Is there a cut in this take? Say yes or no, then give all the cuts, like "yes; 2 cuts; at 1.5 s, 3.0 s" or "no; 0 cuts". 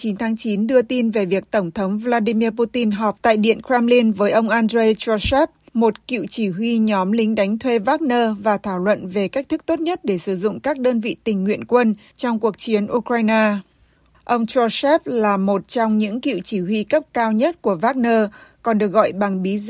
yes; 1 cut; at 14.1 s